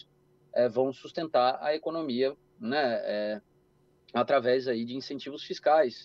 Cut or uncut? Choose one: uncut